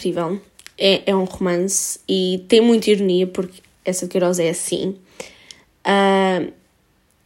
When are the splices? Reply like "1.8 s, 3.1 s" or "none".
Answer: none

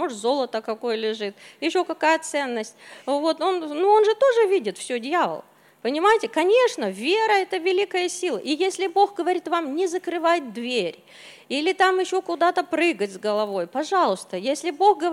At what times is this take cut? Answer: none

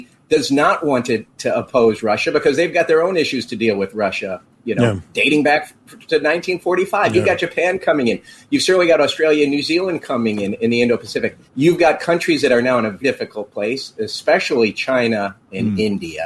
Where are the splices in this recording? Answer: 11.5 s, 13.0 s

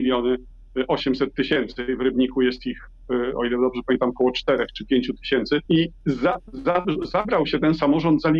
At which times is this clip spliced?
5.7 s

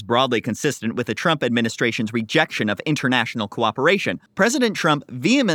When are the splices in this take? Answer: 4.3 s

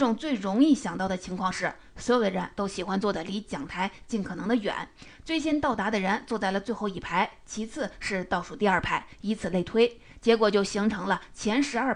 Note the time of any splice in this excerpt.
none

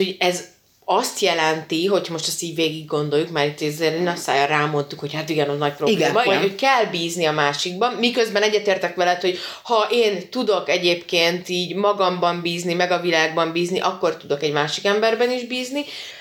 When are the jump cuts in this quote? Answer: 6.2 s

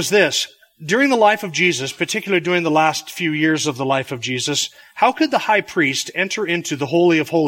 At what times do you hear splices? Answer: none

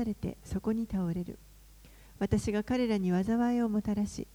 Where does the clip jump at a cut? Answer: none

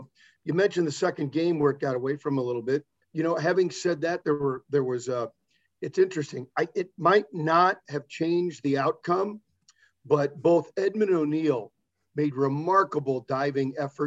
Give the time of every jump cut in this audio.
3.0 s

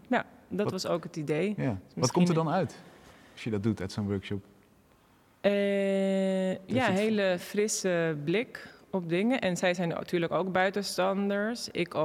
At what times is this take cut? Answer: none

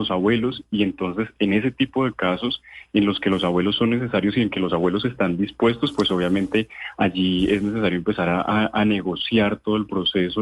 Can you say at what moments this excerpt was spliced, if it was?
none

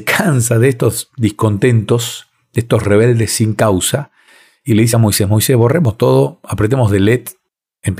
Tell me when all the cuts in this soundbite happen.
none

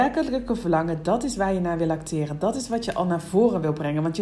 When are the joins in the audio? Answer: none

